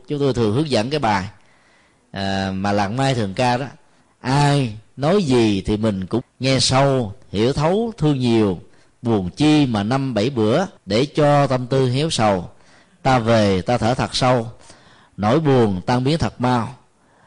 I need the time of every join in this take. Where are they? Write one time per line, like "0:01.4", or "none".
0:06.2
0:10.8

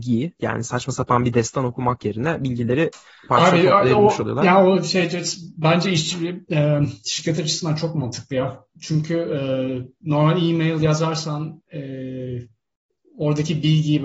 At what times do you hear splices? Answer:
0:03.3
0:10.0

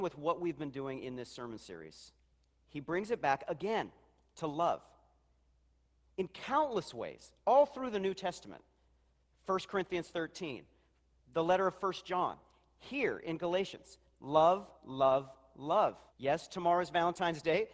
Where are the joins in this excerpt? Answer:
0:14.7
0:16.1

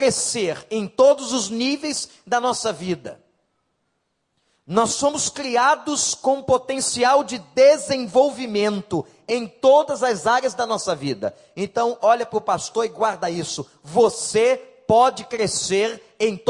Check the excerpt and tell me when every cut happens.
none

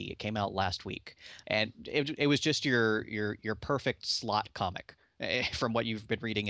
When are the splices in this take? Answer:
0:01.4

